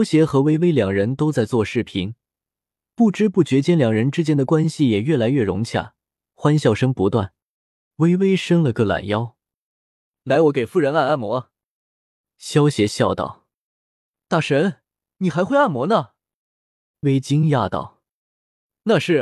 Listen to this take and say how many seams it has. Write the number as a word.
two